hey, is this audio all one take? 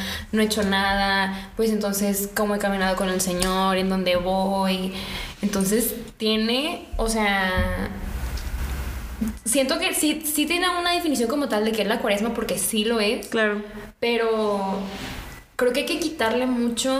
yes; 0 cuts

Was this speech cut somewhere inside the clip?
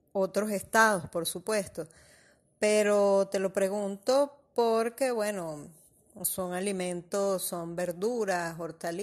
no; 0 cuts

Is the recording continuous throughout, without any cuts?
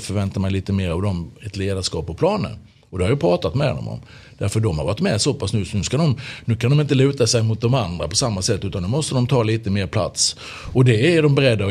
yes; 0 cuts

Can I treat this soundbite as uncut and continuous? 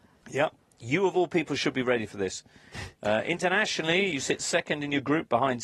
yes; 0 cuts

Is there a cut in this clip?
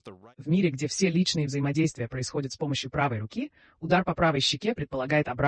no; 0 cuts

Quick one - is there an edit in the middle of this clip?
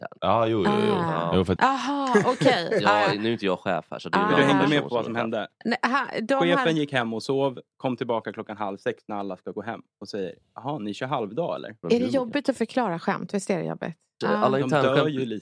yes; 3 cuts; at 1.6 s, 11.8 s, 14.2 s

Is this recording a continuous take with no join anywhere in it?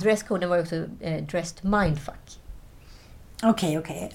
yes; 0 cuts

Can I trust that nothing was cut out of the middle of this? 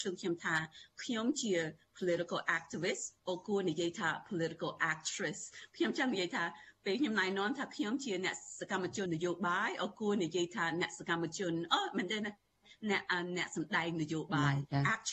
no; 2 cuts; at 3.2 s, 9.1 s

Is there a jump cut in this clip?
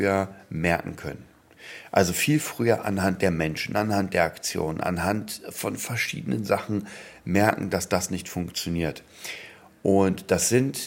no; 0 cuts

